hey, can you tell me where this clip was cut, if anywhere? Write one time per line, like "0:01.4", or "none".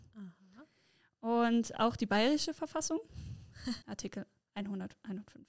0:03.8